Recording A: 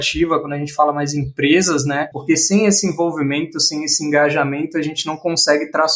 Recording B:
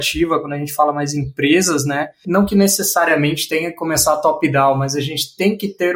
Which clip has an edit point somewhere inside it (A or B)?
A